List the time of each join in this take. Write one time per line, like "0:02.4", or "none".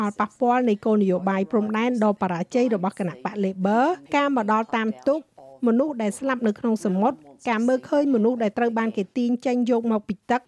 0:04.1